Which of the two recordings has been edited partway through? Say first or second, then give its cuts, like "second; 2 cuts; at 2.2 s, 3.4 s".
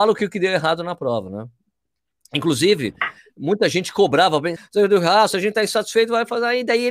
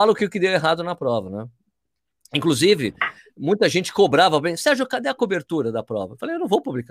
first; 1 cut; at 4.6 s